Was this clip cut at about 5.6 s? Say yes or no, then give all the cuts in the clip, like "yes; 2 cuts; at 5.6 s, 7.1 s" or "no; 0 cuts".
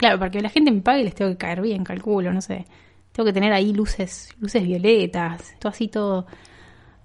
yes; 1 cut; at 5.6 s